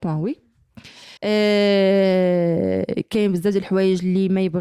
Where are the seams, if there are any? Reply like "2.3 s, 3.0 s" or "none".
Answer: 1.2 s

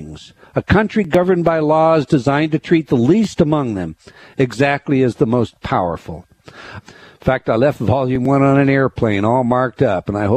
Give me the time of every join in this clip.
6.8 s

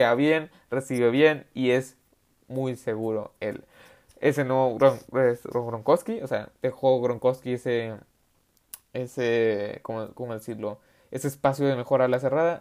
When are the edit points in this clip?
none

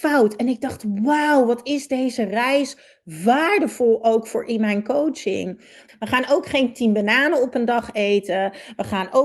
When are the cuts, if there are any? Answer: 5.9 s

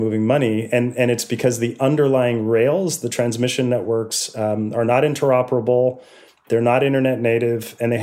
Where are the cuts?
none

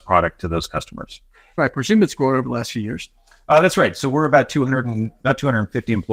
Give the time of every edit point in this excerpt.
1.6 s

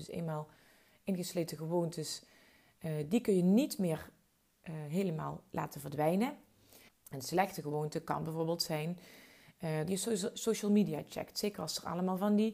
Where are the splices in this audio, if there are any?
6.9 s, 9.9 s

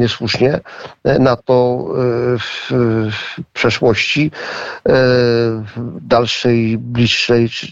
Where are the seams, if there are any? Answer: none

